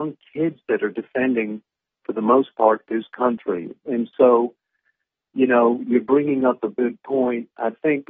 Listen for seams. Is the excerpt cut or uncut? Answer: uncut